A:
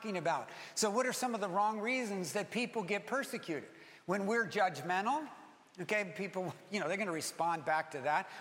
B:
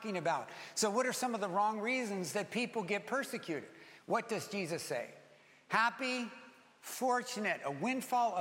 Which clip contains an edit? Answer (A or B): B